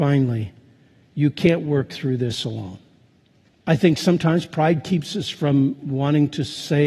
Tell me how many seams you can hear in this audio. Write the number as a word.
one